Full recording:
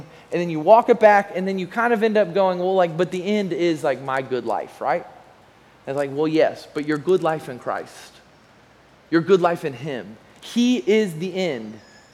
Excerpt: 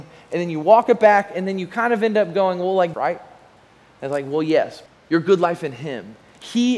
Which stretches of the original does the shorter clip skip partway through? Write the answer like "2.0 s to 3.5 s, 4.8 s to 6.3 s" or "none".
2.9 s to 4.8 s, 6.7 s to 8.9 s